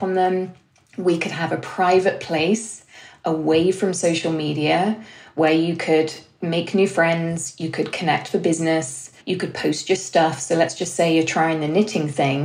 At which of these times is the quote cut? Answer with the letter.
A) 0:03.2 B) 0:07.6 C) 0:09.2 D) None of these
C